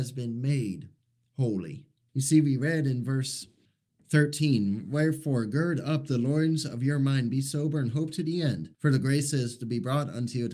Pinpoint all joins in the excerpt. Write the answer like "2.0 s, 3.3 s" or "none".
2.1 s, 8.7 s